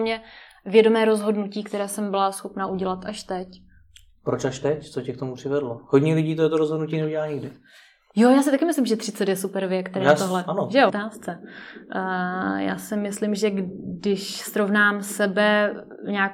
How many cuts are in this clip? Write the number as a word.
one